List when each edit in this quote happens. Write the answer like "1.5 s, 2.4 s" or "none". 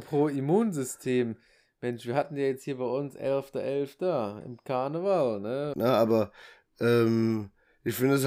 5.7 s